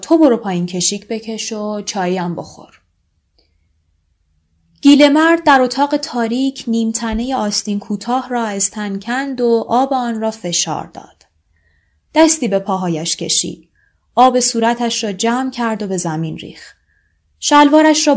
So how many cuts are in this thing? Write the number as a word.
zero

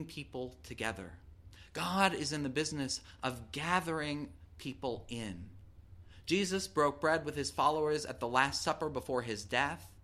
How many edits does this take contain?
zero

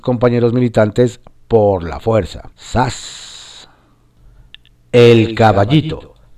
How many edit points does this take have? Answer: one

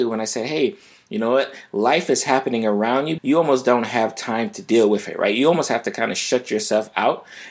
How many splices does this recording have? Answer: one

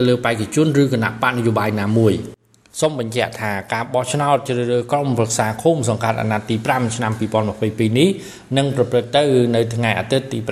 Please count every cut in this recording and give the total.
zero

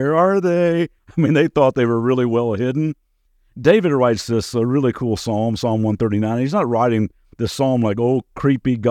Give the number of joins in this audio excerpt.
one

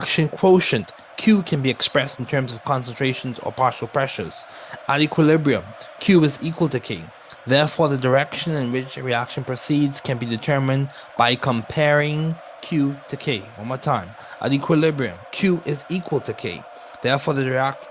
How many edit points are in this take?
one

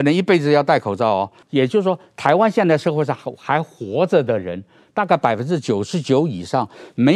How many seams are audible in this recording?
one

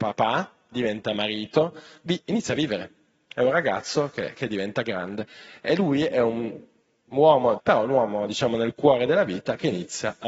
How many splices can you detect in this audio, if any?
one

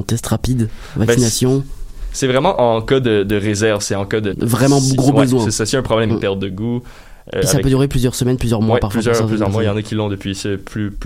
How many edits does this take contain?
two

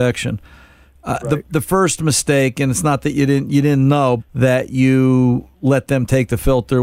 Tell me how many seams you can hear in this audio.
two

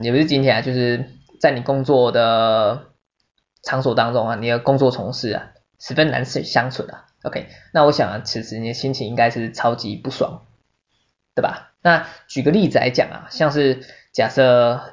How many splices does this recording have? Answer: two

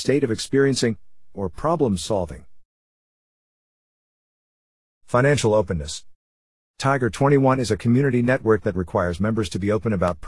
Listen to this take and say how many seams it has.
one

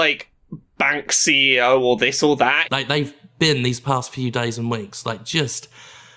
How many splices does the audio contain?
one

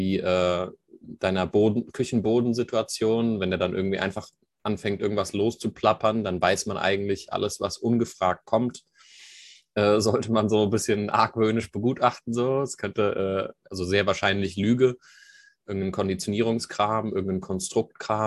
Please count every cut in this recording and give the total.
zero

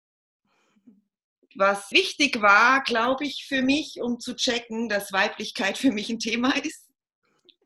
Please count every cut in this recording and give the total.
one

